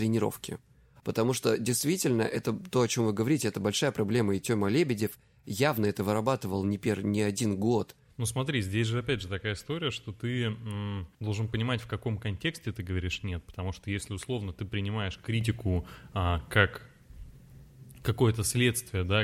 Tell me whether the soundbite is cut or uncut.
cut